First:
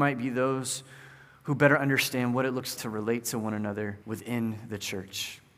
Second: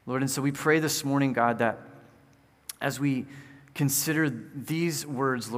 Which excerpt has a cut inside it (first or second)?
first